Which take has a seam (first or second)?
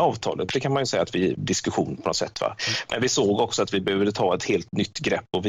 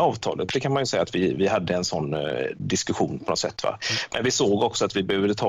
first